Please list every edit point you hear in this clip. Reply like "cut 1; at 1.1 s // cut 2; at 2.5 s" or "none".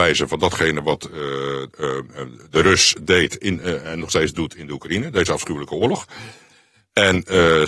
none